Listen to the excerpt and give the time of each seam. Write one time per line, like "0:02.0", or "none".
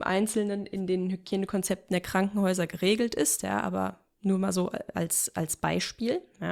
none